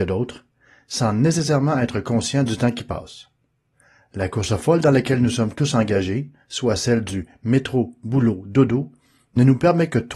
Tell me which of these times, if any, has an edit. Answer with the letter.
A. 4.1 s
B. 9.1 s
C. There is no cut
C